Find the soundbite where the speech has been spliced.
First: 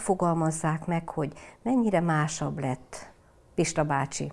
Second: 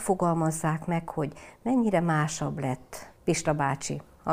second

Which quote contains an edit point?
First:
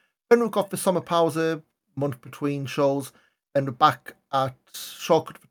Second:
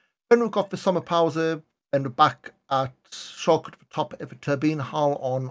second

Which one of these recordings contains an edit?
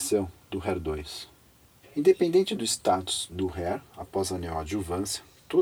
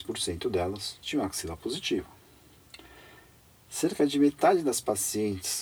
first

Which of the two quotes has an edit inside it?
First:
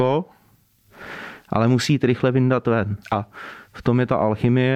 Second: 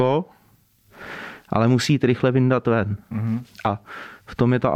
first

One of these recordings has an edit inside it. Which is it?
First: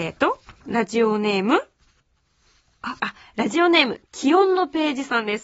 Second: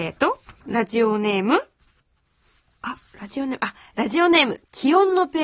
first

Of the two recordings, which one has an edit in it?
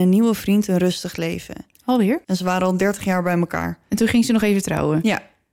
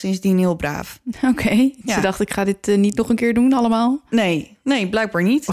first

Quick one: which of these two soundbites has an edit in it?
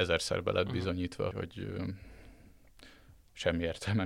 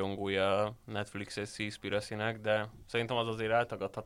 first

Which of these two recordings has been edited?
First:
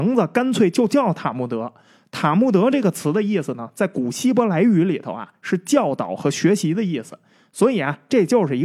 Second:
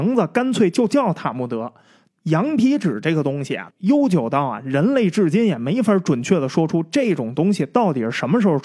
second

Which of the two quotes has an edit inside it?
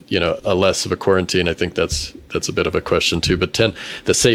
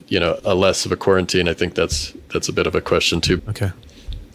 second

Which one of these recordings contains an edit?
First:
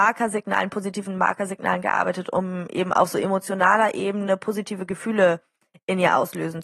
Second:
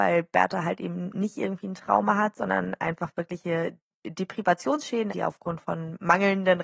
second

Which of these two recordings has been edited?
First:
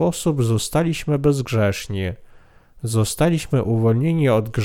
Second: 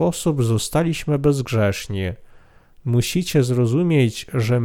second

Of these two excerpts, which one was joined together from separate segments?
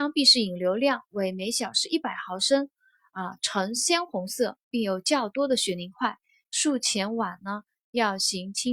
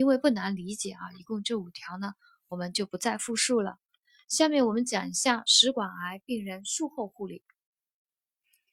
first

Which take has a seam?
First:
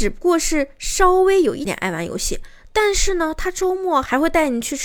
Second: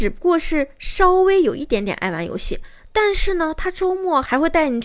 first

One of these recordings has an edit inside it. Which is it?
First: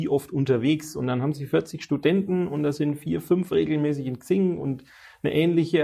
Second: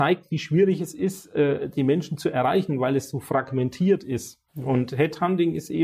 second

